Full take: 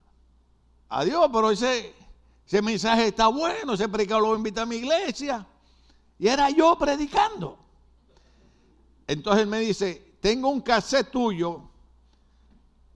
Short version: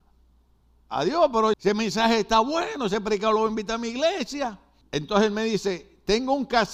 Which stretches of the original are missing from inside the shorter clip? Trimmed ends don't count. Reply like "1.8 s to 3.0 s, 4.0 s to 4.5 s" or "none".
1.5 s to 2.4 s, 5.7 s to 9.0 s